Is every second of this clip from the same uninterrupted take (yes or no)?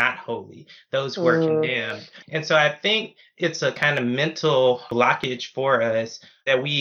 no